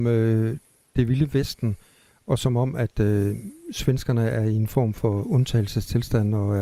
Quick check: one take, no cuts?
yes; 0 cuts

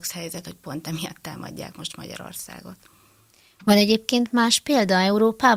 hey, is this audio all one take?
yes; 0 cuts

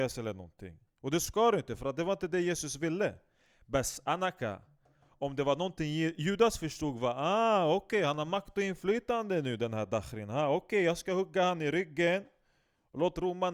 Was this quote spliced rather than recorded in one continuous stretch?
no; 0 cuts

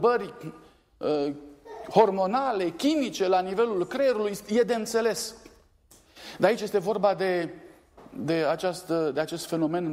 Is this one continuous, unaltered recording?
yes; 0 cuts

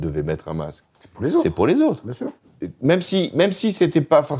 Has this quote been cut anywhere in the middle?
no; 0 cuts

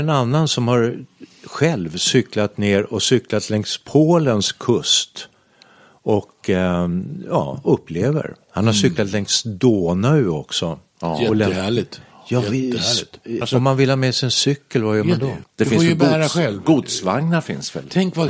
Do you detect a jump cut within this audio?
yes; 2 cuts; at 13.4 s, 15.4 s

